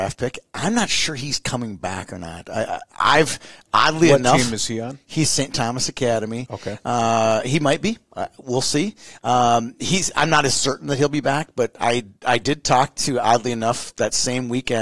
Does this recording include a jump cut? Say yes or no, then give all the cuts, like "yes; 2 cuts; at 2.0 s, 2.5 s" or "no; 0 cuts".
no; 0 cuts